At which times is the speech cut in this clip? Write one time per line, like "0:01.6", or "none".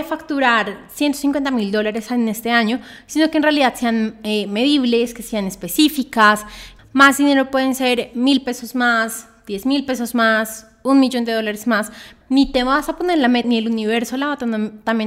0:06.8
0:12.2
0:13.4